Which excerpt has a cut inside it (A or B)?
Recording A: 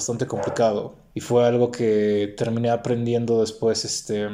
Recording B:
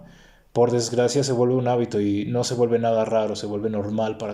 A